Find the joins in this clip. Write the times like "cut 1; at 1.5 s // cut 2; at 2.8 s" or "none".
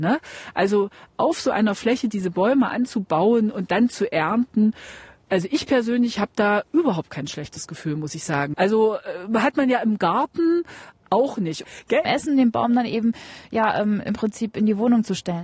cut 1; at 8.5 s // cut 2; at 12.0 s

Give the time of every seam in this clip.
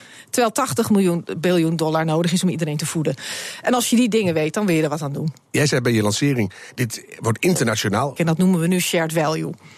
cut 1; at 5.4 s // cut 2; at 8.1 s

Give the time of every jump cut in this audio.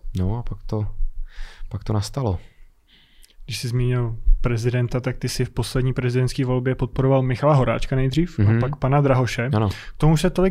none

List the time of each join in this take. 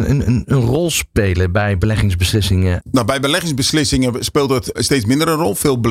cut 1; at 2.8 s // cut 2; at 4.7 s

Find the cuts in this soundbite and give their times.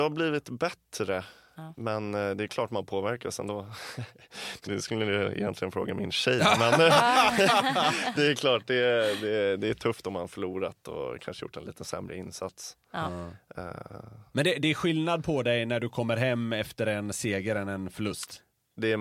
cut 1; at 4.7 s

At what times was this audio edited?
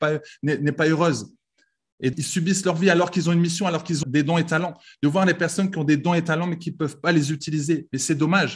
cut 1; at 2.1 s // cut 2; at 4.0 s

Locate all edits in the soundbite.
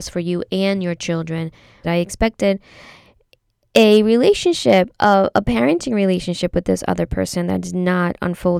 cut 1; at 1.8 s

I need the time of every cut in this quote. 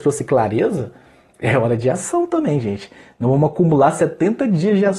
none

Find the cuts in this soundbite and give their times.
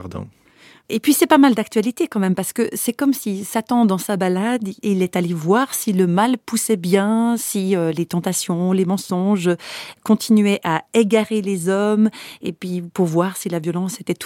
none

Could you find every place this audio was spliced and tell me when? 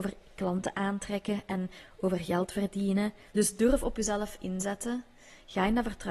cut 1; at 3.3 s

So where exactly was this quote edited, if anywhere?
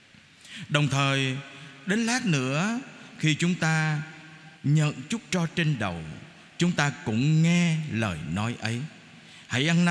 cut 1; at 4.6 s

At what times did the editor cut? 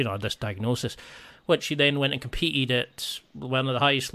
cut 1; at 1.3 s

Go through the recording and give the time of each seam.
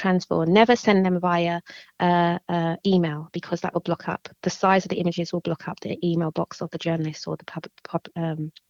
none

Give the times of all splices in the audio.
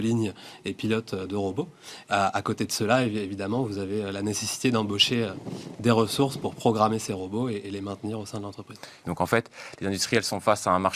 cut 1; at 2.1 s // cut 2; at 9.0 s

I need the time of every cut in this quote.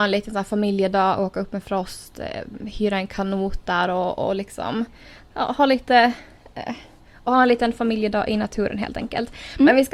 none

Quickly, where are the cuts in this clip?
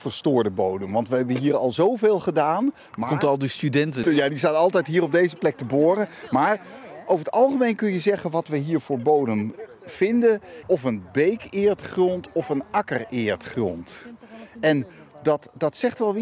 cut 1; at 4.0 s // cut 2; at 10.6 s

